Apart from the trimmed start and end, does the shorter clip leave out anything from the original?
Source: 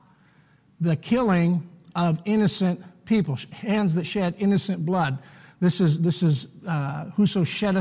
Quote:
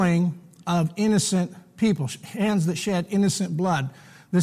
no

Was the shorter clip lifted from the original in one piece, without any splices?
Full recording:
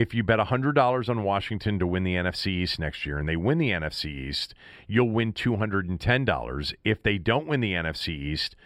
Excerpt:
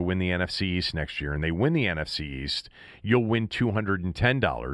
yes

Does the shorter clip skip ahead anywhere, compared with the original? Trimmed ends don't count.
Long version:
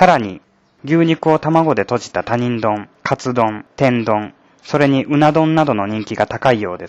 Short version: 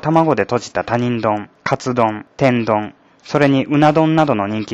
no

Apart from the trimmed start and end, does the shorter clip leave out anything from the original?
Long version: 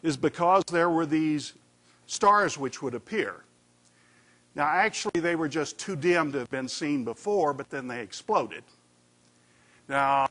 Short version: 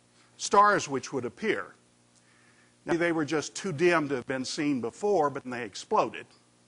yes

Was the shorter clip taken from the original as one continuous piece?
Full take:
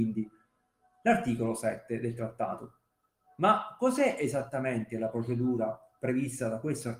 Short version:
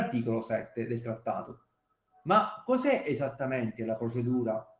yes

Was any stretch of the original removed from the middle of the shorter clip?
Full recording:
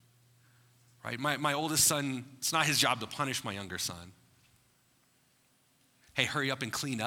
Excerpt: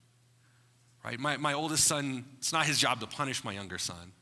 no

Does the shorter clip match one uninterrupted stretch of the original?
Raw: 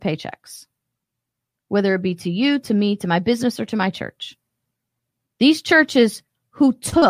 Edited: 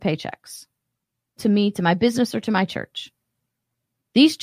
no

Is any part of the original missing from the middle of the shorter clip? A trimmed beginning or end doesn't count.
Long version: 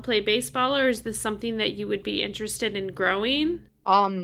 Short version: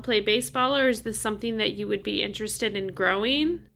no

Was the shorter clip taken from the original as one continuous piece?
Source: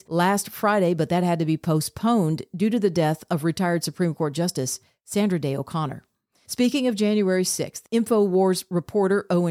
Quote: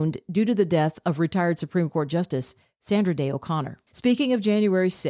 no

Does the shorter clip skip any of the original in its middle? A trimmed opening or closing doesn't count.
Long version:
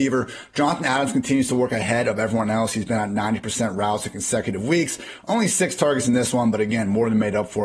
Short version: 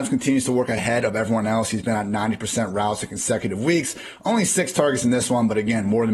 no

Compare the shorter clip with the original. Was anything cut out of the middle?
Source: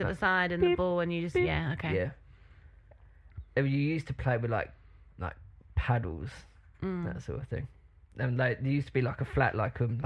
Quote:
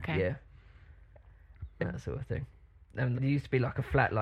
yes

